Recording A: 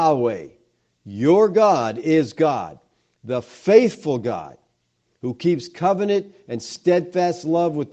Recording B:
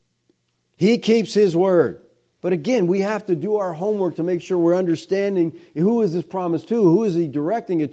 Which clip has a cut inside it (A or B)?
B